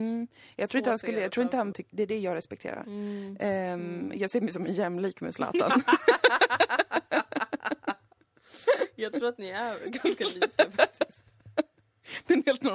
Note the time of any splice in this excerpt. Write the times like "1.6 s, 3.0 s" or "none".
1.7 s